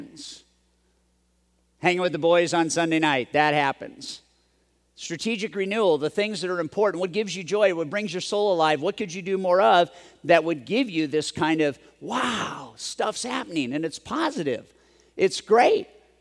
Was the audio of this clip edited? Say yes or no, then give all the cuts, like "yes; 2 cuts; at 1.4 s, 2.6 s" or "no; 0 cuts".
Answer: no; 0 cuts